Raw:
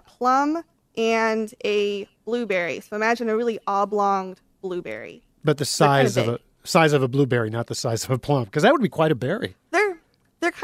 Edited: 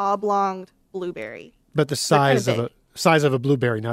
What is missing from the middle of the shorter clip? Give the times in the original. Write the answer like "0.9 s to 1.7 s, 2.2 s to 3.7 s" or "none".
none